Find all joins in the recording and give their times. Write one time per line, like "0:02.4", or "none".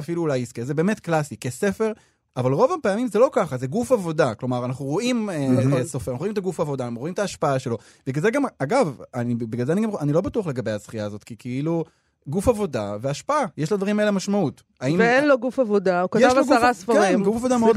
0:02.3